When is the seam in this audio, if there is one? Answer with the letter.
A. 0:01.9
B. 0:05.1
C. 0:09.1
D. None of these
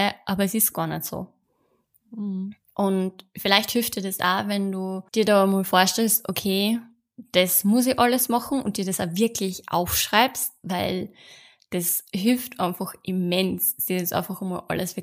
B